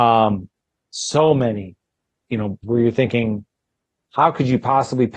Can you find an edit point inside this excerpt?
yes; 1 cut; at 2.6 s

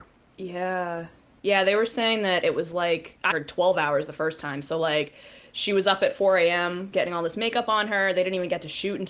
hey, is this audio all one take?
no; 1 cut; at 3.3 s

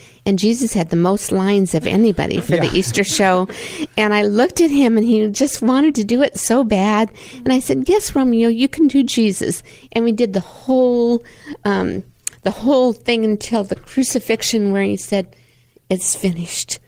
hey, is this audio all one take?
yes; 0 cuts

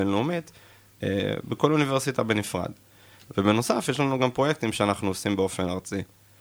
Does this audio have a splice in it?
no; 0 cuts

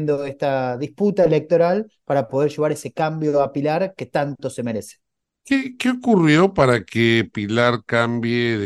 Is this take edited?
no; 0 cuts

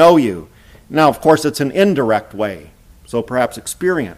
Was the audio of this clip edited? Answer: yes; 1 cut; at 2.9 s

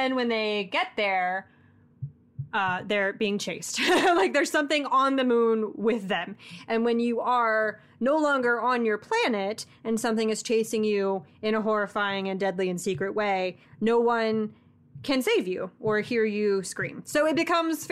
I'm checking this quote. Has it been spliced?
no; 0 cuts

